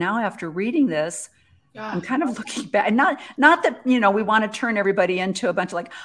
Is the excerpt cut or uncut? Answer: uncut